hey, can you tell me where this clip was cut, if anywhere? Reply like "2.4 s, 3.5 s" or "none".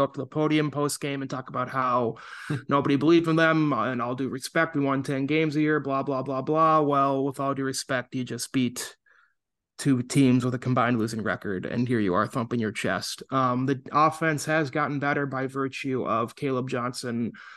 6.2 s